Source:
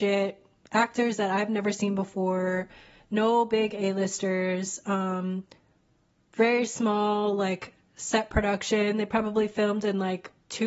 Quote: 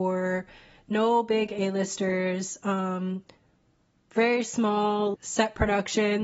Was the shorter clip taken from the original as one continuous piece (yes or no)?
no